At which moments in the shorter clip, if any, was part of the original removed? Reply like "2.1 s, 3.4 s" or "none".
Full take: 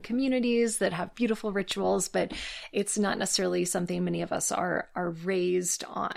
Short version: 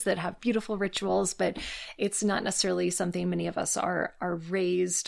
none